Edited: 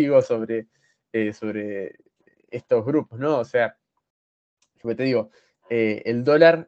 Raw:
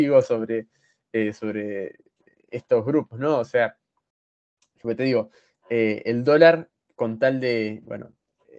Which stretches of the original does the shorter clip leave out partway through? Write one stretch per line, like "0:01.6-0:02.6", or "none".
none